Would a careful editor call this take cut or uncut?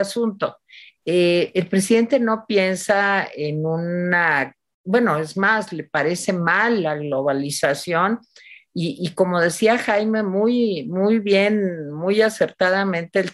uncut